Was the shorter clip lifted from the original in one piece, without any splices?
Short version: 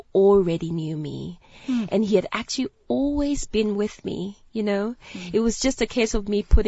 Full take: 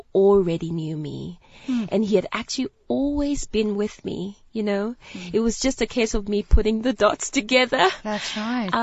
yes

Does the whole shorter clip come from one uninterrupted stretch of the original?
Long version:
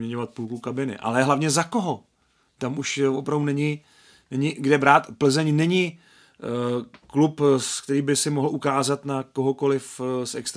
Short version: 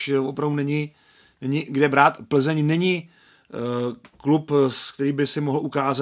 yes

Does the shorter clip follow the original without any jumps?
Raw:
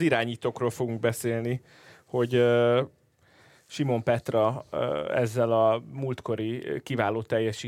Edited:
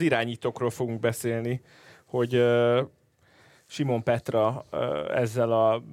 yes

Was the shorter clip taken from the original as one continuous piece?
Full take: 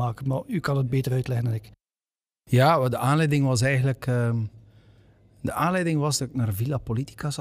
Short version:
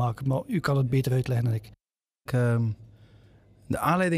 no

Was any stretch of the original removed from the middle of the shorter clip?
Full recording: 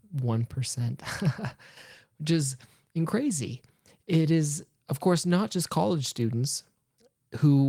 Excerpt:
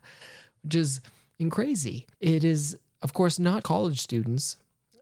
yes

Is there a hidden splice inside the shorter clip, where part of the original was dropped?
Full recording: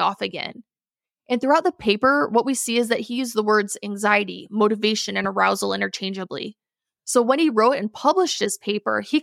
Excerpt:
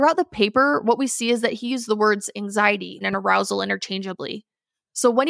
yes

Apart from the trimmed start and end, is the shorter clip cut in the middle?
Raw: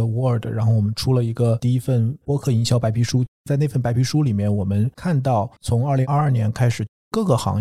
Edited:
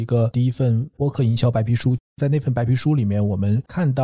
no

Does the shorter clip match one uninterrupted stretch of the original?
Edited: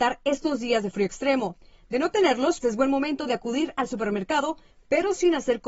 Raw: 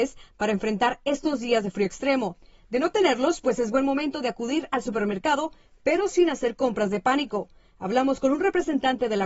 no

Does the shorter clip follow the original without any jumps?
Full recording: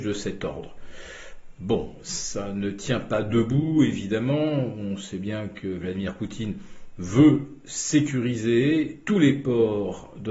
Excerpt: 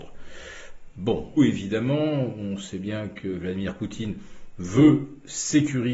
no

